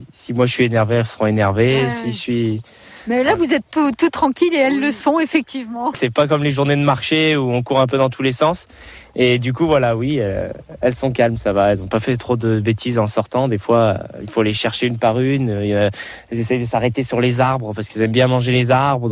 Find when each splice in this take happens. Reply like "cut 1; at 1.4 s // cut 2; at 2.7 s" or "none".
cut 1; at 5.9 s